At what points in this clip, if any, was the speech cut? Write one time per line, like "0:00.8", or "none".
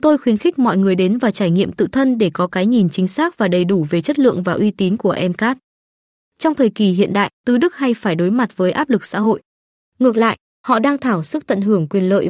0:06.2
0:07.4